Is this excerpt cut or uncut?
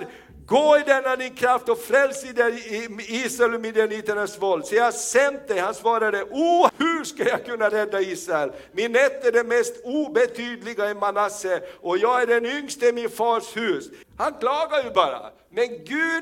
cut